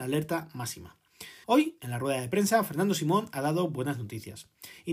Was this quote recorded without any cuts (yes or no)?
no